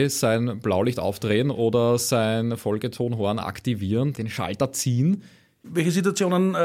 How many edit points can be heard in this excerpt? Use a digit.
1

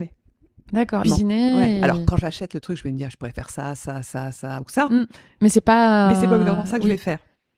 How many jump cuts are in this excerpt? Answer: 1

